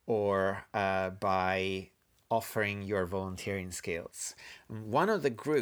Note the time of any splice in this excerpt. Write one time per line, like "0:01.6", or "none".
none